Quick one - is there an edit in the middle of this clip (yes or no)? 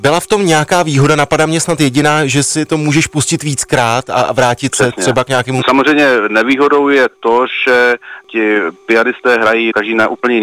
yes